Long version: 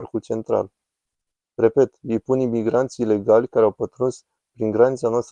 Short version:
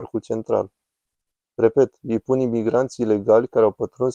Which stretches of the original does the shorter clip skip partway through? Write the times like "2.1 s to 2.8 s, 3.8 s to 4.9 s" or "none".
none

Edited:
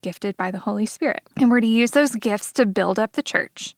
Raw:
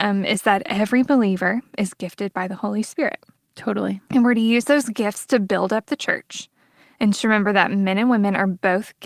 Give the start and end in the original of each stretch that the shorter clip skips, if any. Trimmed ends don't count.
3.3 s to 4.0 s

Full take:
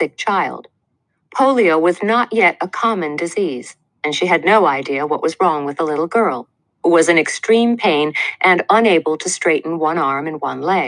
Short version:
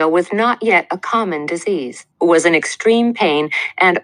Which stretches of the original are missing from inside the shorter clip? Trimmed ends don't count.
3.8 s to 6.8 s

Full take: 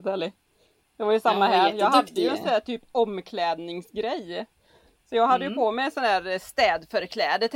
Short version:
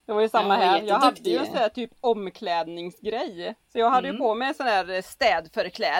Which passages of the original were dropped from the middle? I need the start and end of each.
4.5 s to 5.0 s

